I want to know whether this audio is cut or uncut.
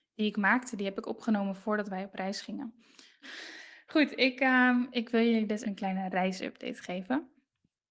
cut